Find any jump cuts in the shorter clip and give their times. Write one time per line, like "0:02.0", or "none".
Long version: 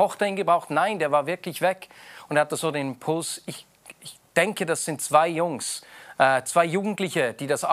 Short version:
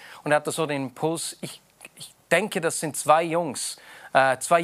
none